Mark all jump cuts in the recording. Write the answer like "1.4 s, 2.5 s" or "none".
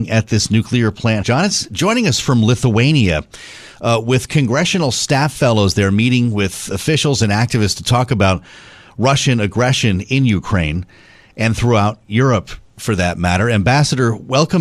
1.2 s